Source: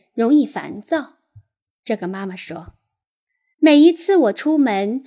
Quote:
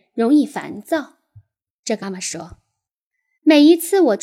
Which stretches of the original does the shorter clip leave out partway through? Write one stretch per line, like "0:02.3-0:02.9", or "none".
0:02.0-0:02.2